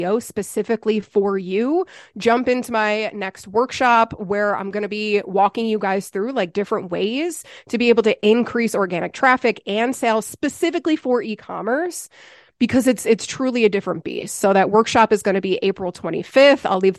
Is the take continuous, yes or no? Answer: yes